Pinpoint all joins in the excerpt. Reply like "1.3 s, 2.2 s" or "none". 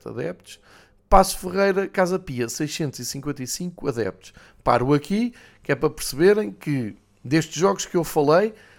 none